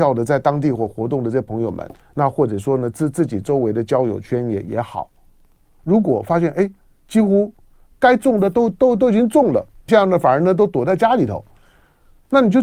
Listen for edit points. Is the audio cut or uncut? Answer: cut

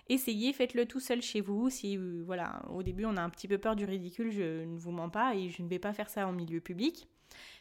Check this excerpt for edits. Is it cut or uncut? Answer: uncut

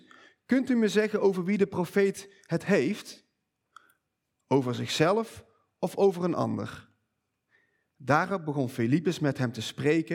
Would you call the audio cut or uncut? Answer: uncut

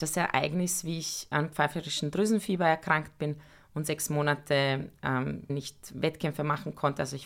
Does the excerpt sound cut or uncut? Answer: cut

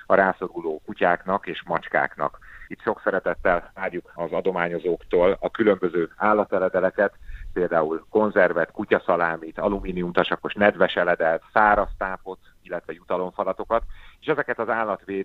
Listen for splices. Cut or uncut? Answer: cut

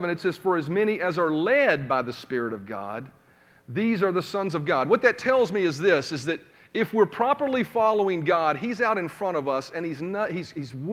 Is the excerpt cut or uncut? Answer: uncut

